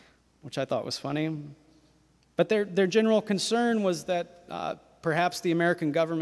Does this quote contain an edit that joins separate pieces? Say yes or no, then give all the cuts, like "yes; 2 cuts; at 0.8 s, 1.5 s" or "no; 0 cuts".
no; 0 cuts